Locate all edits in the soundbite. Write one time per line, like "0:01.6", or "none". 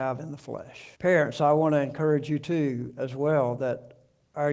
0:00.9